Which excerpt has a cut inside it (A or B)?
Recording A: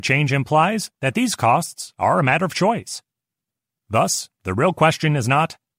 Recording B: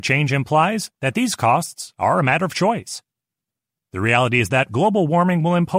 A